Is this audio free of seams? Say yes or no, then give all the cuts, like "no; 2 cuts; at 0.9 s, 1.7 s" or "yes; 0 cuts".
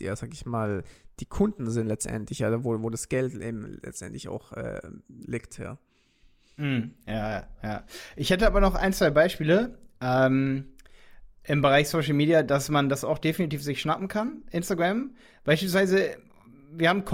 yes; 0 cuts